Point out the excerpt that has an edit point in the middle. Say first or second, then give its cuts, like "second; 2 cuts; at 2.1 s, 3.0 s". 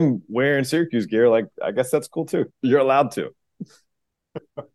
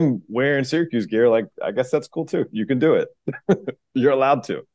first; 1 cut; at 2.5 s